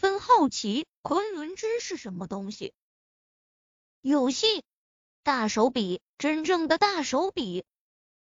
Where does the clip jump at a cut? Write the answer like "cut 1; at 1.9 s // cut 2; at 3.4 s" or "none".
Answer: cut 1; at 5.1 s

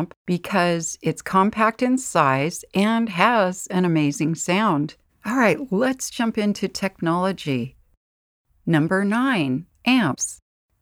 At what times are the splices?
cut 1; at 5.1 s

